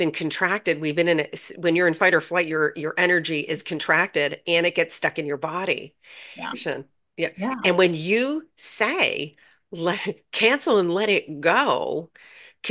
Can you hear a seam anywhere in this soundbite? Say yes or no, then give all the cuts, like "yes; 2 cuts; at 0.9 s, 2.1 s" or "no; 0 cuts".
yes; 2 cuts; at 6.5 s, 7.6 s